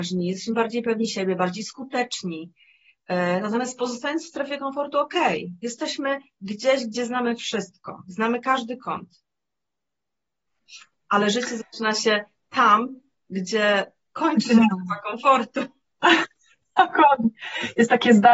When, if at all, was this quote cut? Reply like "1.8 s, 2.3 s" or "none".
none